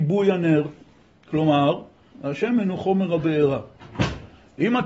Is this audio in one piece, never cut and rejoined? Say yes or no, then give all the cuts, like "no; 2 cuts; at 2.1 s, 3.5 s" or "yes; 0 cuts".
no; 1 cut; at 2.1 s